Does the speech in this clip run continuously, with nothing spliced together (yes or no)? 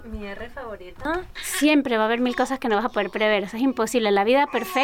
no